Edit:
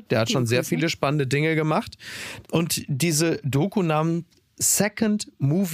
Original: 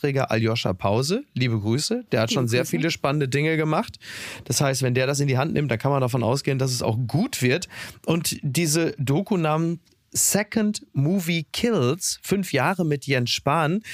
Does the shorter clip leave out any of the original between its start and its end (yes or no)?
yes